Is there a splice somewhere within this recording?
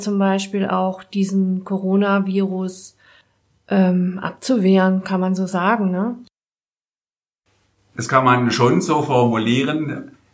no; 0 cuts

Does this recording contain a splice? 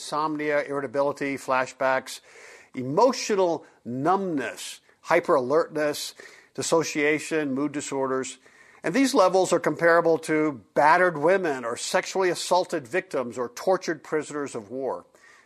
no; 0 cuts

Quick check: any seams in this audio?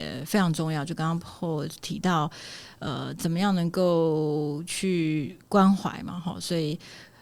no; 0 cuts

